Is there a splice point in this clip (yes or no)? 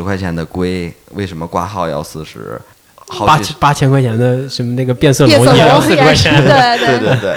no